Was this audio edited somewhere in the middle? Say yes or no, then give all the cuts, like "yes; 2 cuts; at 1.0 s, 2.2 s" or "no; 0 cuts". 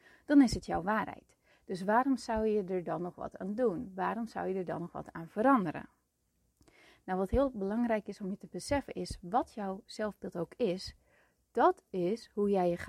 no; 0 cuts